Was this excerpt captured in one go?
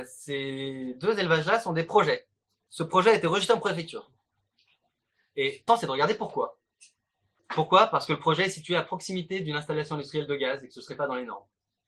no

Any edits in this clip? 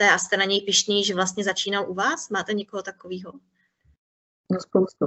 no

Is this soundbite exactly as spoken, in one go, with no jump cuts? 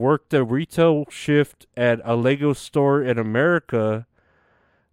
yes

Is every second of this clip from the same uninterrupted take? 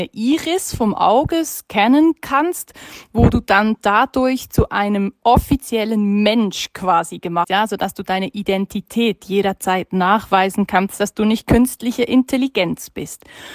no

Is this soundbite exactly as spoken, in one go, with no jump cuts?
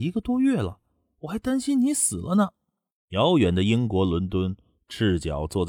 yes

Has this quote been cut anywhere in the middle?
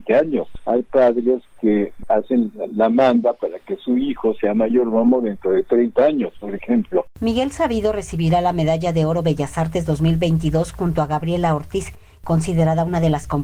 yes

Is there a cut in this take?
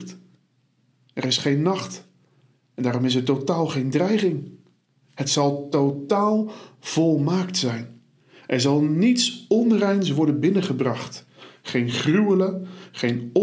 no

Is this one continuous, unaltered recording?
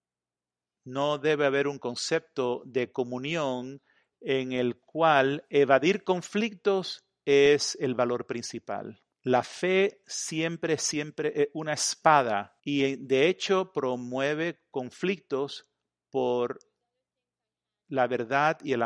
no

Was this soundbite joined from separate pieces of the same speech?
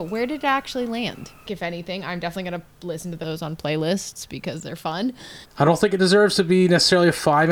yes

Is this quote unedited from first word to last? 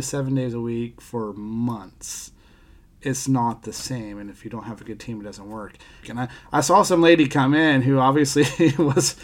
no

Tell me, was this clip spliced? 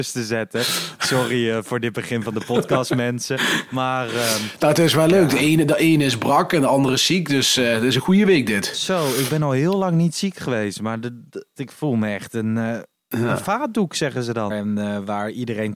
yes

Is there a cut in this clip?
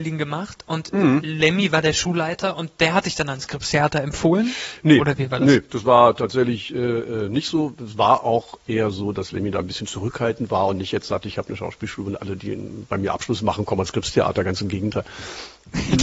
no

